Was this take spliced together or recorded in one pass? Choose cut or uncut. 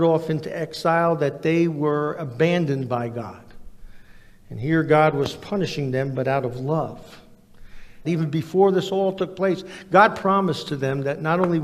cut